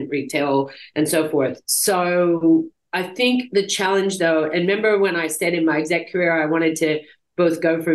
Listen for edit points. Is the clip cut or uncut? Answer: uncut